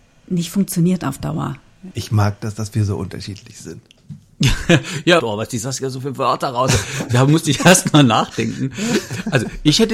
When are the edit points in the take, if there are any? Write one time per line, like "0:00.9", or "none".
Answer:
0:01.9
0:05.2

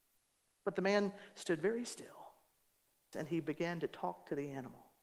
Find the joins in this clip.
0:03.1

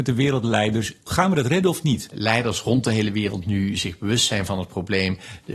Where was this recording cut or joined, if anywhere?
0:01.1
0:02.1

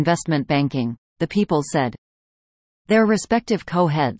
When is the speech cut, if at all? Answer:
0:01.1

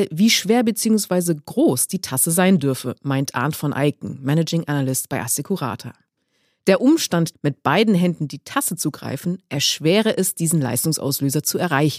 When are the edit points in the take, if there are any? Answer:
0:07.3

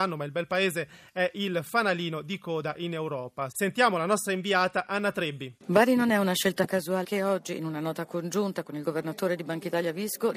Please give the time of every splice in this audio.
0:03.5
0:05.6
0:07.0

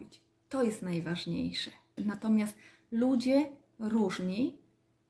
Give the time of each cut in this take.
0:02.0

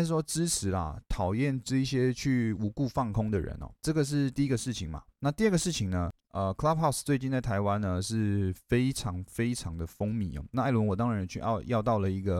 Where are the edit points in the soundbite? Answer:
0:06.2

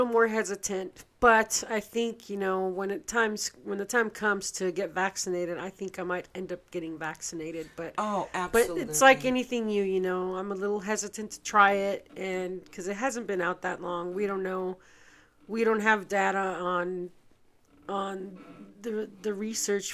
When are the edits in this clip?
none

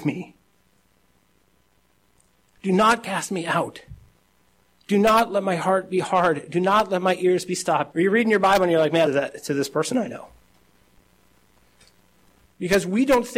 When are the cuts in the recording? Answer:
0:07.9
0:09.1

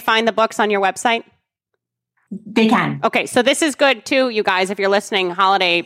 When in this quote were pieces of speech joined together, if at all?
none

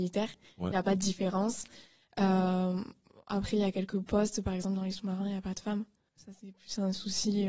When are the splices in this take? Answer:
0:06.1

